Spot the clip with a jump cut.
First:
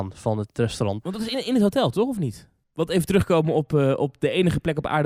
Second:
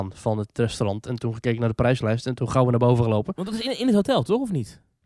first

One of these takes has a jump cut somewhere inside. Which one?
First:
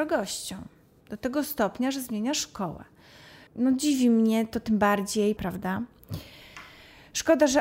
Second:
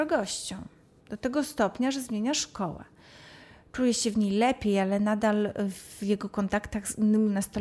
first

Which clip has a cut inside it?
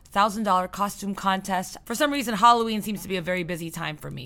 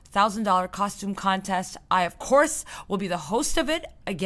first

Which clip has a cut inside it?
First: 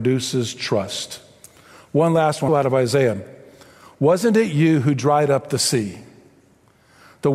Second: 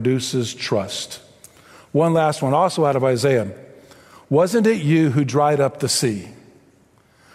first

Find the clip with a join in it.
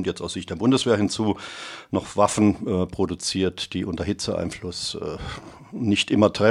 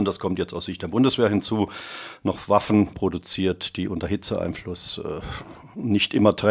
second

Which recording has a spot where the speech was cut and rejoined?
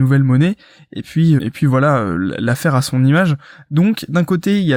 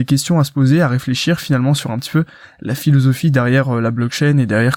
first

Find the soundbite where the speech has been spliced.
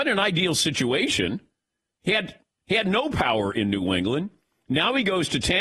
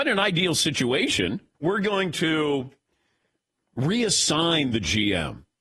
second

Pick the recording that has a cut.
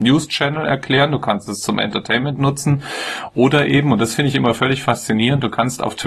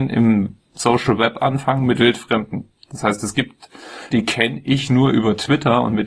second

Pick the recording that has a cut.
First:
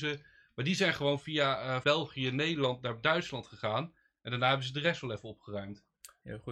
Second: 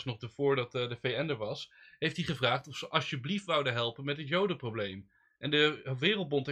first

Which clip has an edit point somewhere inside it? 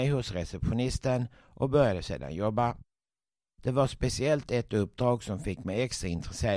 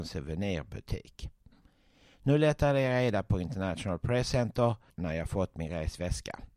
second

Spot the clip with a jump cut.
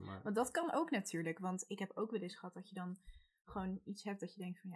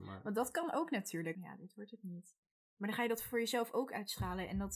second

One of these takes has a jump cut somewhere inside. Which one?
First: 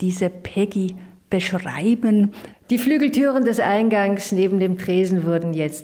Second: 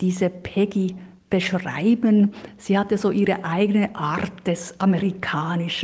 first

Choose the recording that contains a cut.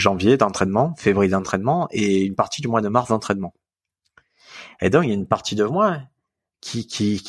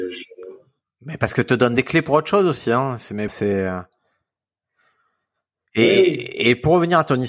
second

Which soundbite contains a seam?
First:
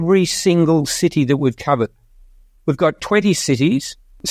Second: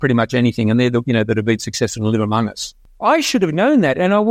second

